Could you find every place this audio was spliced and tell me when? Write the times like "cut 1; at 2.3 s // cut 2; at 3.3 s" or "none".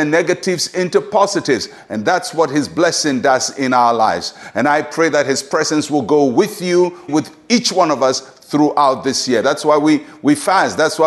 cut 1; at 7.1 s // cut 2; at 9.4 s